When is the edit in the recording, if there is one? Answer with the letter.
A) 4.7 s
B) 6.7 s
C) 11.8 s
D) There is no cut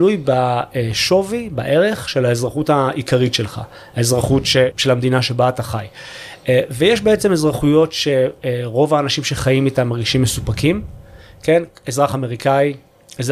A